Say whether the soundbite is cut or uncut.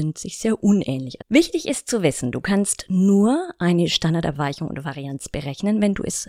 cut